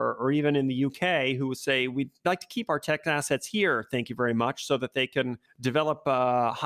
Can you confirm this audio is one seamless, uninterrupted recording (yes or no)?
yes